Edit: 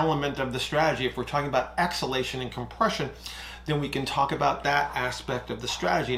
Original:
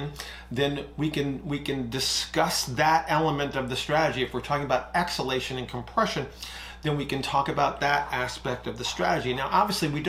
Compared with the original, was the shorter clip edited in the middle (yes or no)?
no